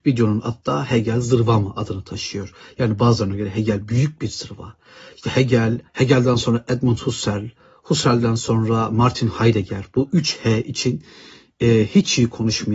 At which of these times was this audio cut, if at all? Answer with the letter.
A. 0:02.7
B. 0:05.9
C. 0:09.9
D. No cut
B